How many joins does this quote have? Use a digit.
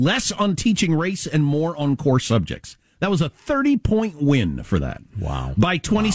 0